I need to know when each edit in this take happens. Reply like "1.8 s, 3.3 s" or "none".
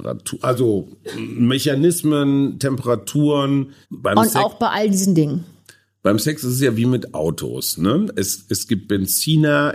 3.8 s